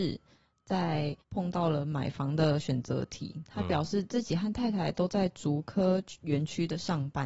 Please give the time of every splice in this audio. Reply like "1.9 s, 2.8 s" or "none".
1.2 s